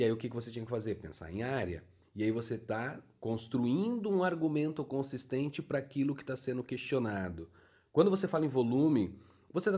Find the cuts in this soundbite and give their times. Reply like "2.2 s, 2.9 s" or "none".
2.0 s